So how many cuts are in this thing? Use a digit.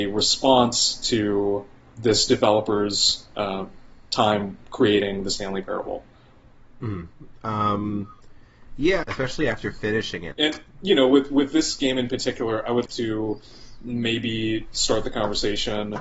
3